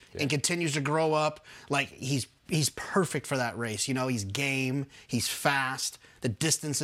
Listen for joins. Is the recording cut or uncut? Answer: uncut